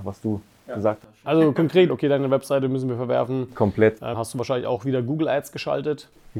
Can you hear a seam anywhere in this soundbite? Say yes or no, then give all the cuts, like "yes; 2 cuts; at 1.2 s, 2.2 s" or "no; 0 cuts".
yes; 2 cuts; at 1.9 s, 4.1 s